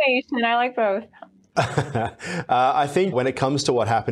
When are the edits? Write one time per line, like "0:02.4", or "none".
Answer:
0:03.1